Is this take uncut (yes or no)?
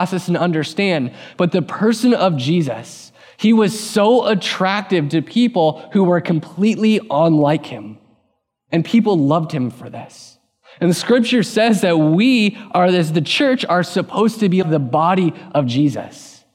no